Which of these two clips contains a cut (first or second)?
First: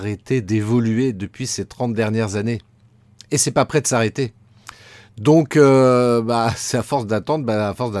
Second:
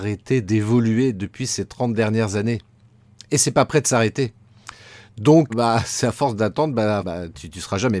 second